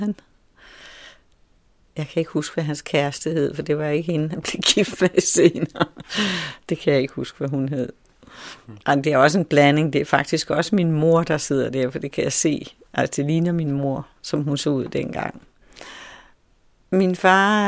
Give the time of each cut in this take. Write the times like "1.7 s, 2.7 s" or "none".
none